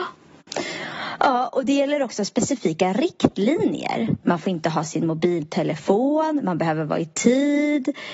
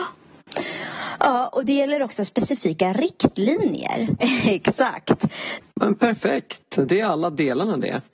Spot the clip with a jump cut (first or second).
second